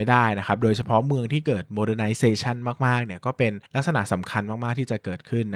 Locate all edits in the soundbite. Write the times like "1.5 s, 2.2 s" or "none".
3.7 s